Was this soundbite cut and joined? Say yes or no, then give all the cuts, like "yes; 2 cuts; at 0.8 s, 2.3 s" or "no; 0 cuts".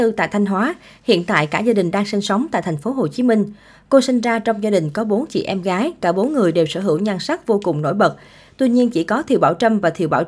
no; 0 cuts